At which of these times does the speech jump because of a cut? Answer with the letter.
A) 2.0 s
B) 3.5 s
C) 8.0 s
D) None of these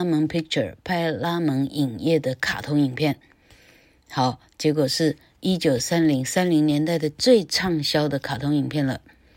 D